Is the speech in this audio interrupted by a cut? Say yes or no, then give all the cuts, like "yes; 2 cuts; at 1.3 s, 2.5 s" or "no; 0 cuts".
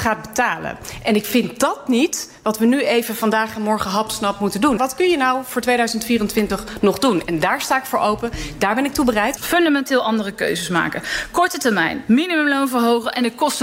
yes; 2 cuts; at 4.8 s, 9.4 s